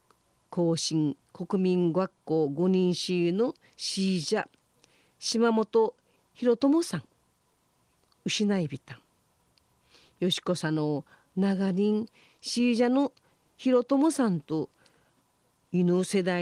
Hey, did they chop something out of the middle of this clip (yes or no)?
no